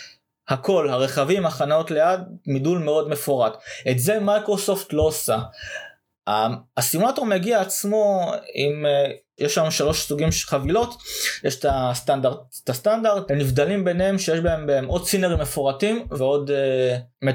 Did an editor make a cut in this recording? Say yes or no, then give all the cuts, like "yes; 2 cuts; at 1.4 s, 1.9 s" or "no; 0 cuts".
yes; 2 cuts; at 13.3 s, 16.1 s